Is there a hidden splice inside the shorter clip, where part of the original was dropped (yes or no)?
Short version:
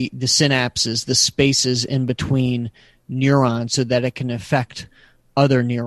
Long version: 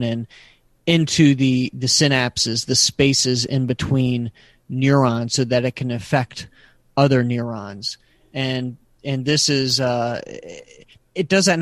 no